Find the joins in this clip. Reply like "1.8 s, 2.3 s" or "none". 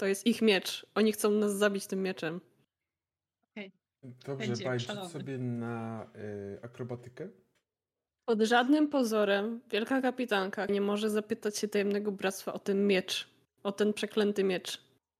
3.8 s, 8.1 s, 10.7 s